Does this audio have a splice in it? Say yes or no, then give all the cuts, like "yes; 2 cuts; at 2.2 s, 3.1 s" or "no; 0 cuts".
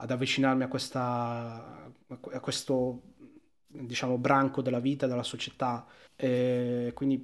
yes; 1 cut; at 6.1 s